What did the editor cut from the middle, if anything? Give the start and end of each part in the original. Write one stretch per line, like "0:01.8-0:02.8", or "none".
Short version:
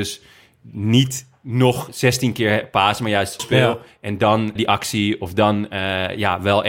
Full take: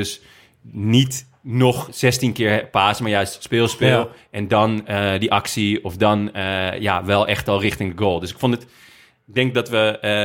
0:03.4-0:03.7
0:04.9-0:05.2